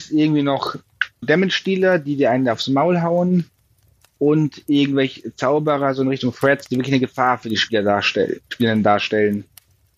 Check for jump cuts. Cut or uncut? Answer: cut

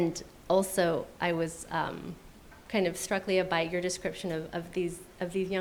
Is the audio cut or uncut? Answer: uncut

